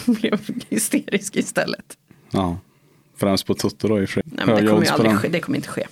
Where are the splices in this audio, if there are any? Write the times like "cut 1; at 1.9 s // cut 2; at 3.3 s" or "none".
cut 1; at 4.2 s